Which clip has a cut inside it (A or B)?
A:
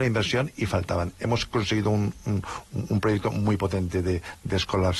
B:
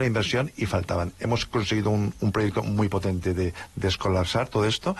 B